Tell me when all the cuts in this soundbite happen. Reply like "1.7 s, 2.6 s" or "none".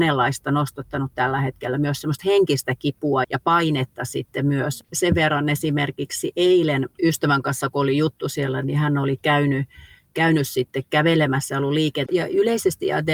3.2 s, 6.9 s, 12.1 s